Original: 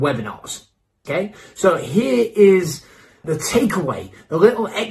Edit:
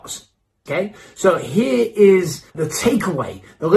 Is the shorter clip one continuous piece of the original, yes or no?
no